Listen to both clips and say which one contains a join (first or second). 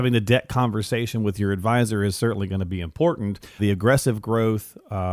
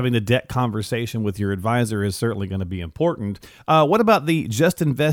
first